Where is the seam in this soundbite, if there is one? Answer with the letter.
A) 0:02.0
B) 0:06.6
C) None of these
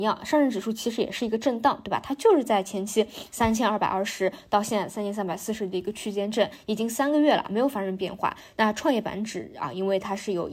C